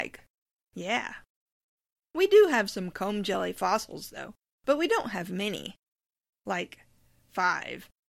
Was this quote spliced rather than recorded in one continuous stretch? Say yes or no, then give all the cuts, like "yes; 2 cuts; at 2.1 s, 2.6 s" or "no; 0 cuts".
no; 0 cuts